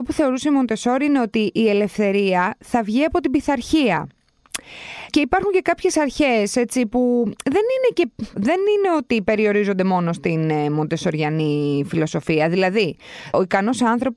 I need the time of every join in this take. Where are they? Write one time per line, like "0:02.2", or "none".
0:08.3